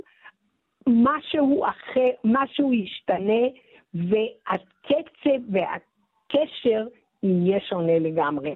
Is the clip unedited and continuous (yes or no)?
yes